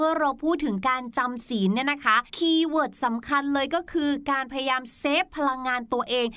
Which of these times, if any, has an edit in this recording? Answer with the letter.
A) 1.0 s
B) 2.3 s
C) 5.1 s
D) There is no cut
B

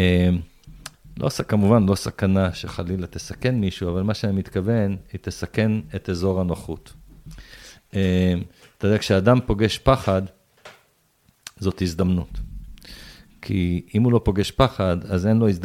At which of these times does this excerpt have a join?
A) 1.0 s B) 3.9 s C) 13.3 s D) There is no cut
D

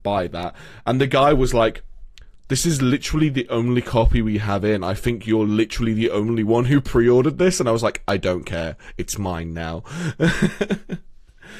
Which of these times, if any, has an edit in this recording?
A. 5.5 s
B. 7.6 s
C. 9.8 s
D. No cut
D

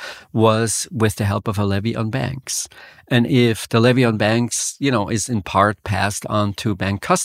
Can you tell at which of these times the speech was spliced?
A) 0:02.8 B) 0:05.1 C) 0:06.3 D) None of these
D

